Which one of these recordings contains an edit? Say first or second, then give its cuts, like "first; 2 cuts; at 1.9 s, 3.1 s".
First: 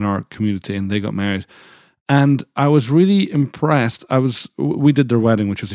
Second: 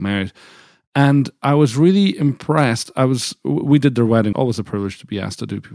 second; 1 cut; at 4.3 s